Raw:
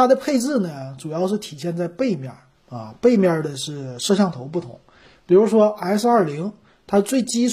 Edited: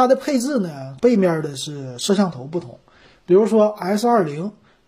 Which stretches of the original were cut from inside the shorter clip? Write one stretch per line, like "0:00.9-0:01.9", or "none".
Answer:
0:01.0-0:03.0